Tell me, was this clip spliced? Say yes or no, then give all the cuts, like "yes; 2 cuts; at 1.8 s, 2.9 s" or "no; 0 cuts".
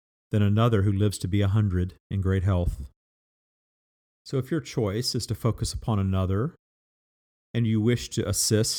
no; 0 cuts